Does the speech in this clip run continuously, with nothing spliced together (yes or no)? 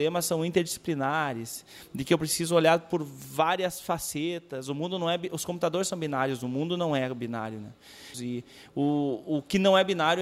no